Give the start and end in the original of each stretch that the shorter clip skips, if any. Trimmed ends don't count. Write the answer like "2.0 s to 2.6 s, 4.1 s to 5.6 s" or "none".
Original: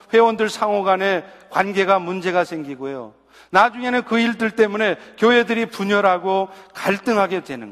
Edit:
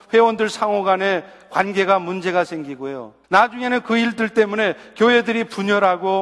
3.2 s to 3.5 s